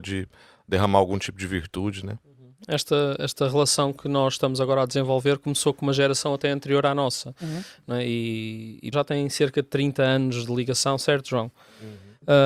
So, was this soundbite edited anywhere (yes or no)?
yes